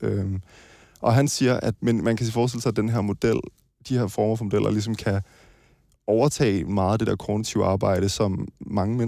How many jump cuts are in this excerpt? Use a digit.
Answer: 1